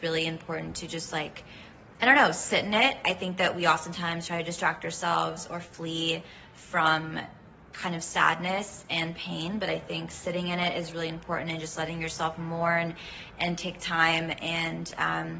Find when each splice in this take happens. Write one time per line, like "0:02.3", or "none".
none